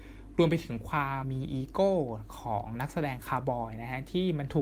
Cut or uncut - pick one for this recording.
cut